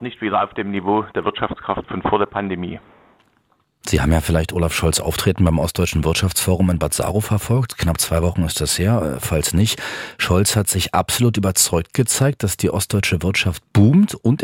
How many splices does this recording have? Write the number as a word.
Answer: zero